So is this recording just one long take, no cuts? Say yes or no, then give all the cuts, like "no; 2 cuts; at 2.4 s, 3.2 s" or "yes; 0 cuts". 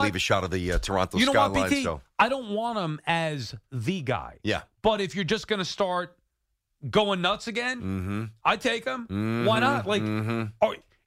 yes; 0 cuts